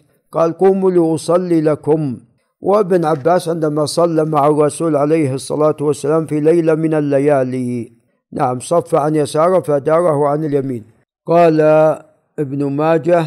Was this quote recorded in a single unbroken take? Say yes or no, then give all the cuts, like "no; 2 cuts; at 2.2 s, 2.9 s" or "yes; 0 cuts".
yes; 0 cuts